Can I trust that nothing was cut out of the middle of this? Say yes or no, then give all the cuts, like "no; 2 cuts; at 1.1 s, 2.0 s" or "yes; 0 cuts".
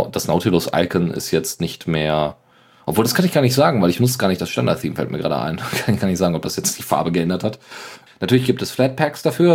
no; 1 cut; at 8.1 s